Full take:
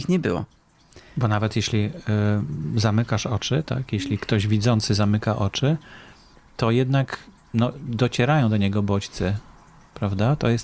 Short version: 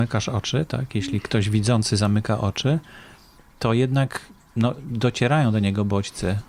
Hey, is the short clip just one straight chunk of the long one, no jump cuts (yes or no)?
yes